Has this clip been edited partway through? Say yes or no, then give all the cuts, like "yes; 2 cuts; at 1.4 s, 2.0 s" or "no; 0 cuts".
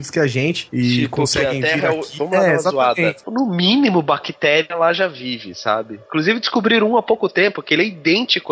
yes; 2 cuts; at 2.2 s, 3.2 s